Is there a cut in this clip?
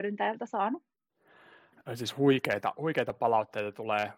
no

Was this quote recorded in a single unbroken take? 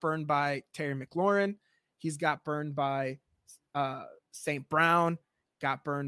yes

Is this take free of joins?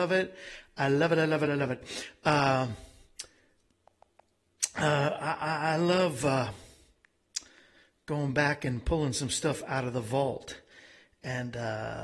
yes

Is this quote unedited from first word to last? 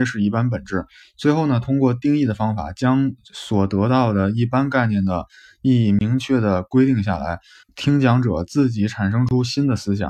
no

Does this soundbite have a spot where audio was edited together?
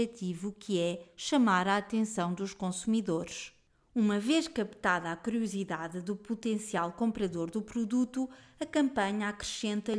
no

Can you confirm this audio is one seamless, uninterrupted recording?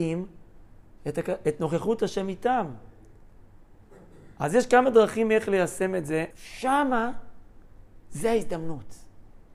no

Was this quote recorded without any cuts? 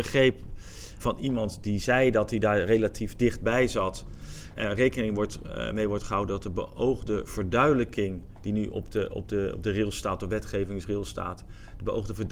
no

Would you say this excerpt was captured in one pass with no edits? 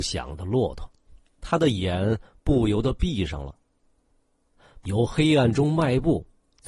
no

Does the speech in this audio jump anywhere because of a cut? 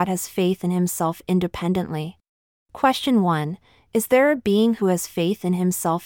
yes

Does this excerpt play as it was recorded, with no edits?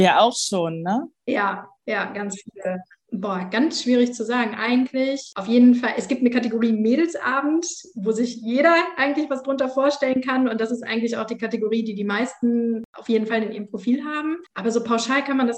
no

